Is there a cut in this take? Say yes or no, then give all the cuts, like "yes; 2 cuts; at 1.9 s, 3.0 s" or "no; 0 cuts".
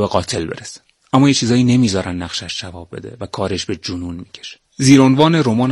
yes; 1 cut; at 4.7 s